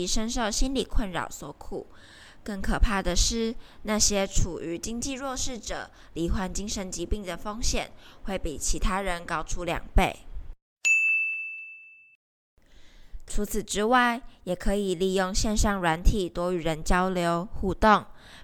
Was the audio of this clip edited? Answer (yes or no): yes